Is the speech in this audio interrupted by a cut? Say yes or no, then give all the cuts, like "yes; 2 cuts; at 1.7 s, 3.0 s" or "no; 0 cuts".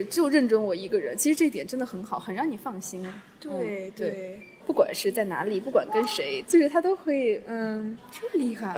yes; 2 cuts; at 4.6 s, 6.4 s